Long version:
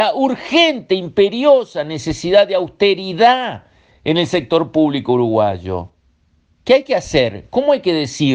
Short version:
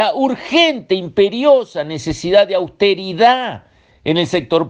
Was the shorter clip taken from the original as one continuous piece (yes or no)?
yes